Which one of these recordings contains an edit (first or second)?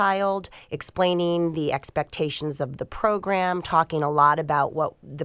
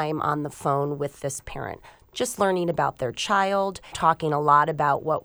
second